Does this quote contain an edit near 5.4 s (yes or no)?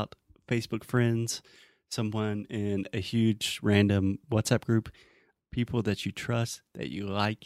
yes